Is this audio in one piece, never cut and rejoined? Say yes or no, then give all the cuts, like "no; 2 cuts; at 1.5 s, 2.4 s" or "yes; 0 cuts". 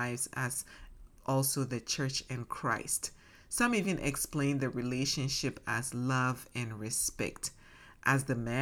yes; 0 cuts